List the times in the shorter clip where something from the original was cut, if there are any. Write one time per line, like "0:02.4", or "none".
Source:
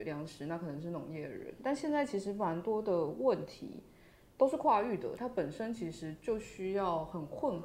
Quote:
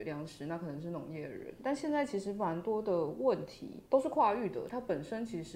0:03.9

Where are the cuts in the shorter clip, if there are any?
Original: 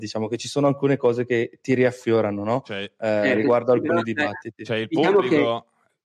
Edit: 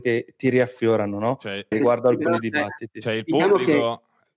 0:01.7

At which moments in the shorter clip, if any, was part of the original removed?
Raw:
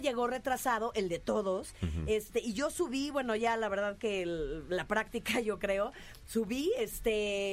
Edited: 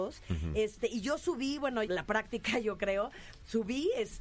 0:01.8

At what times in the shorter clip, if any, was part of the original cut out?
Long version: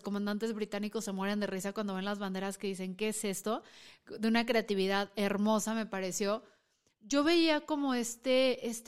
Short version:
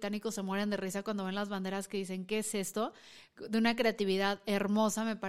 none

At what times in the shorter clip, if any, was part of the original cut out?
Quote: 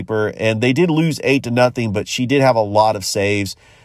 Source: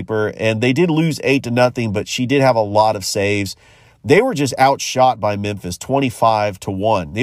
none

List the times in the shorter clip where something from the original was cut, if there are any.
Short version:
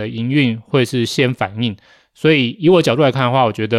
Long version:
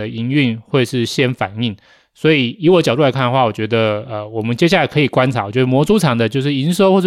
none

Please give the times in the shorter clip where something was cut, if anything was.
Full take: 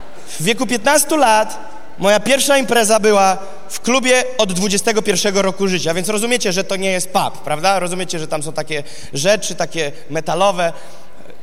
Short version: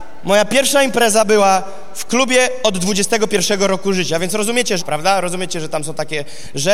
0:04.8

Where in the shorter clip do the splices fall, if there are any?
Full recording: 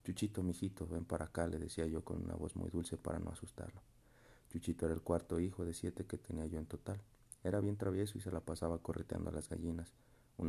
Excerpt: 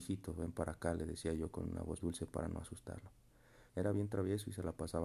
0:02.0
0:03.7

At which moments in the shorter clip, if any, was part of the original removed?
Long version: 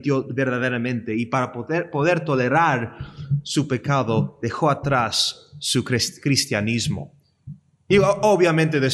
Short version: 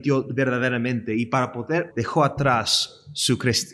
0:01.9

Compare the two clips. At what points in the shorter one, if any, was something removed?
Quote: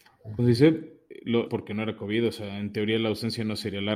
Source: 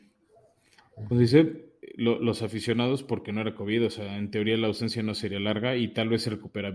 0:01.5

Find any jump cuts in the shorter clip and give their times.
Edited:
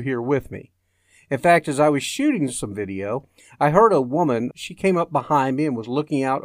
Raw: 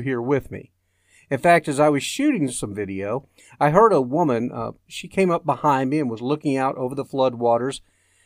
0:04.5

